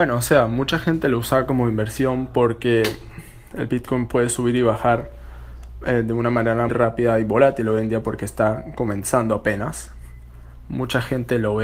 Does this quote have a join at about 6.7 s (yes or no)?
yes